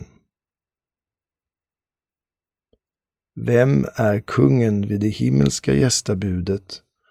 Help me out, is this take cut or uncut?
uncut